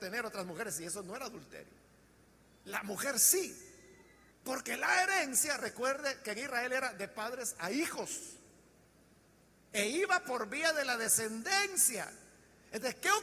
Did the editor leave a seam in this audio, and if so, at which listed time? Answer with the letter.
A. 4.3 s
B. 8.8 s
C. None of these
A